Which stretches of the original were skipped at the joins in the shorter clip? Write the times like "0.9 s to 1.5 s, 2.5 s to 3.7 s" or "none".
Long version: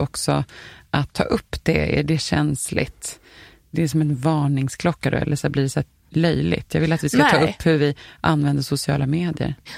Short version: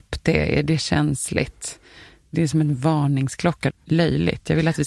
5.1 s to 5.9 s